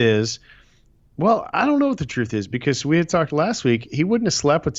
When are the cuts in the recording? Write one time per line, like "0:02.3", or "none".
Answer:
0:01.0